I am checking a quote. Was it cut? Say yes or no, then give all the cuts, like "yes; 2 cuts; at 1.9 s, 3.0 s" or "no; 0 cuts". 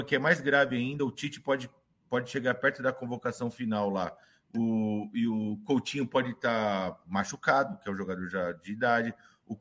no; 0 cuts